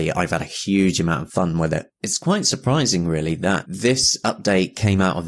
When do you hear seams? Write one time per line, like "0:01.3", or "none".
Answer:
0:02.0